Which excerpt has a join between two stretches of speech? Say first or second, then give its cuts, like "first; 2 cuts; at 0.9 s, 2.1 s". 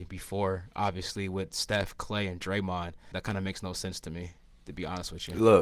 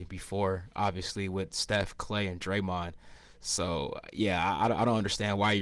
first; 1 cut; at 3.1 s